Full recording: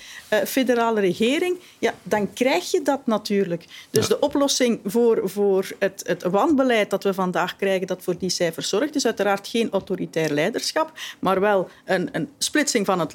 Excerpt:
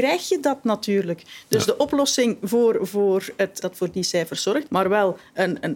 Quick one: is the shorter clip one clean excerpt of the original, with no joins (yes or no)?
no